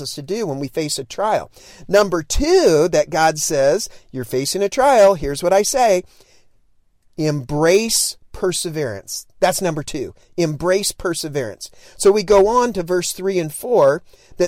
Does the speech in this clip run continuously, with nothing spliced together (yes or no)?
yes